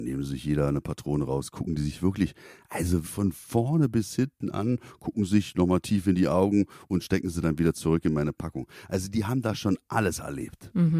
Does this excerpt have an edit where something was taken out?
yes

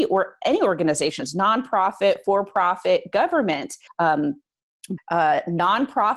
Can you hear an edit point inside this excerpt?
yes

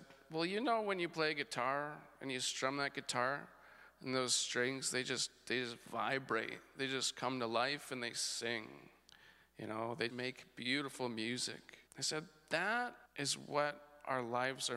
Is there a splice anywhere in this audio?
yes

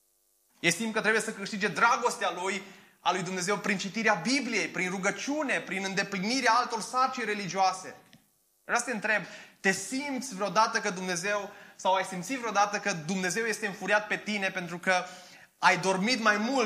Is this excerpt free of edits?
yes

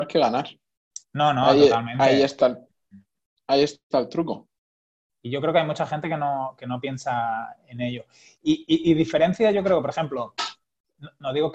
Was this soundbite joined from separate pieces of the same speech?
no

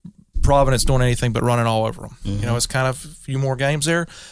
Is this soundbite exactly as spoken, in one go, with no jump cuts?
no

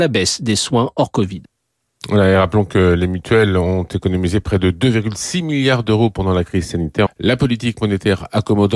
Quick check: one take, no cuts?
no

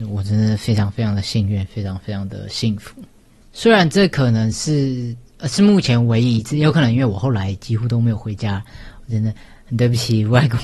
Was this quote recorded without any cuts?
yes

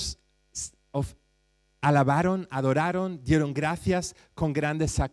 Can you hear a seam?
no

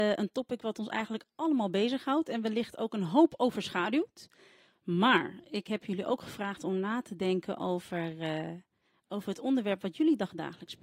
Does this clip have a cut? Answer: no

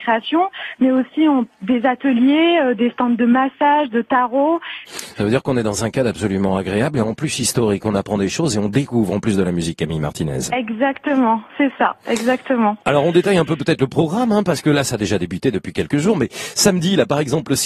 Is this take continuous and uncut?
no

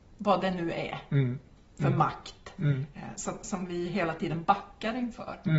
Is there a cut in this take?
no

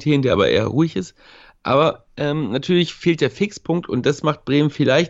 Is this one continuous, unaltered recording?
yes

